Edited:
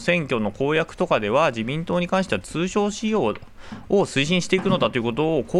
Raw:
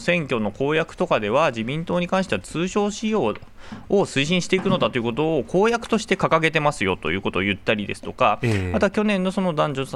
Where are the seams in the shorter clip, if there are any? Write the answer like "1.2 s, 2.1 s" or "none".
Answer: none